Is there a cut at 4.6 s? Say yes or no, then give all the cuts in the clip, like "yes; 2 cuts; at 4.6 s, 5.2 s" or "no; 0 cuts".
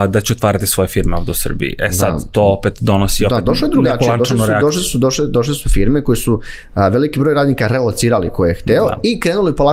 no; 0 cuts